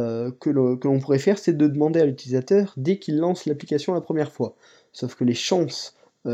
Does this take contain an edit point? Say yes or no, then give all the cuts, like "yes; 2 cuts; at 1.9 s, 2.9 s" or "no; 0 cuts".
no; 0 cuts